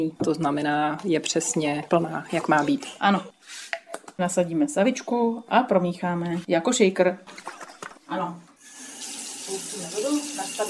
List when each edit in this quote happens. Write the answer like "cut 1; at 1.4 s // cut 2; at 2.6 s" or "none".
cut 1; at 8.0 s